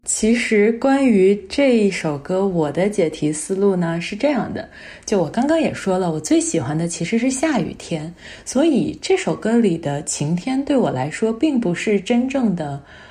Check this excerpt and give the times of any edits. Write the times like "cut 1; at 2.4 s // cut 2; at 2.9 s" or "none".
none